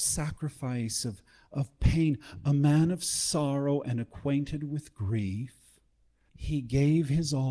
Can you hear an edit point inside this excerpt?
no; 0 cuts

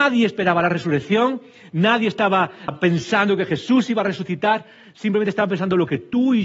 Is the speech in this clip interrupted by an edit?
yes; 1 cut; at 2.7 s

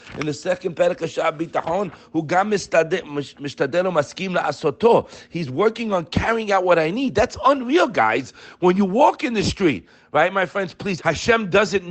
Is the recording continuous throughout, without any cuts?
no; 1 cut; at 11.0 s

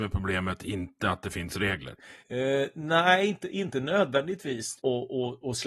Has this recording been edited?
yes; 2 cuts; at 2.2 s, 4.8 s

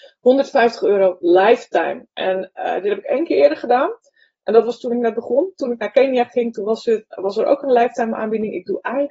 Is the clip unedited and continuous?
yes; 0 cuts

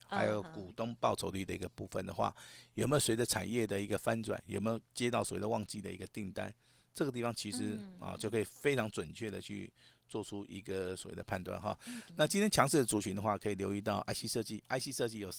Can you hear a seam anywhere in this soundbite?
no; 0 cuts

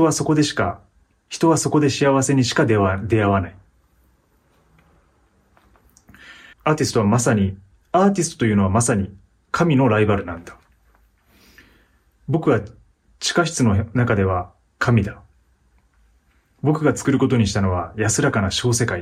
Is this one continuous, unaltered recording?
no; 1 cut; at 6.5 s

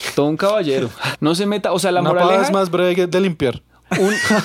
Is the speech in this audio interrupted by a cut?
yes; 1 cut; at 1.1 s

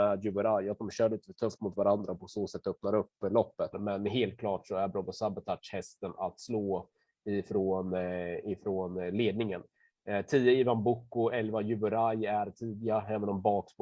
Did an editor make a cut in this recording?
yes; 1 cut; at 3.7 s

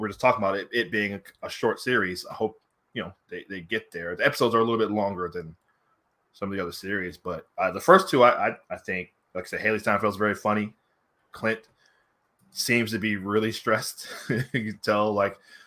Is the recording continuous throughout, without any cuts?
no; 1 cut; at 8.6 s

